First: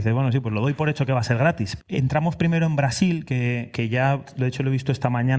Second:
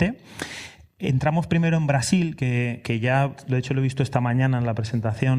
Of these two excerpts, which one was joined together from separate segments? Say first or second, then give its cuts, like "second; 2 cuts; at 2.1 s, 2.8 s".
first; 1 cut; at 1.8 s